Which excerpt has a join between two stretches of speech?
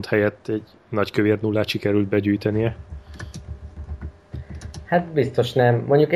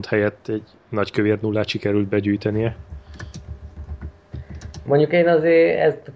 second; 1 cut; at 4.9 s

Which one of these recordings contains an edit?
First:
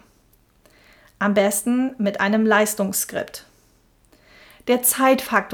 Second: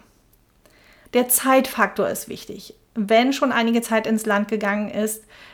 second; 1 cut; at 1.1 s

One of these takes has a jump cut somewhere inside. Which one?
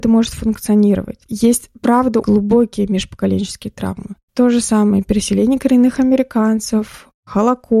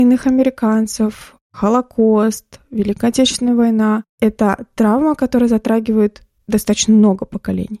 first; 1 cut; at 2.2 s

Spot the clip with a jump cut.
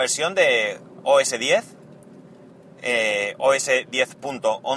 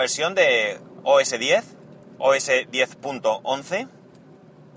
second; 1 cut; at 2.2 s

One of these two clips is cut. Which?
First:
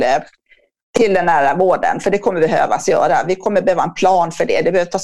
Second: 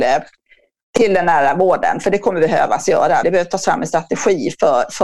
second; 1 cut; at 3.2 s

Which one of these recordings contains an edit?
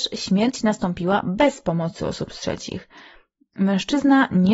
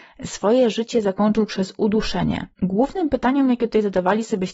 second; 1 cut; at 2.5 s

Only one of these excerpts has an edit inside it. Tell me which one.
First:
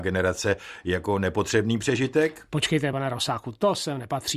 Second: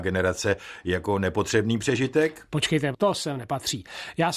second; 1 cut; at 2.9 s

